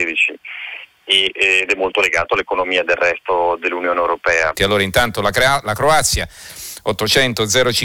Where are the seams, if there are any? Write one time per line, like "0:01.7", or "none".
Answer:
0:04.5